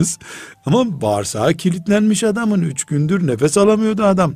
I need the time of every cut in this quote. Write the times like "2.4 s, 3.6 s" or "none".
none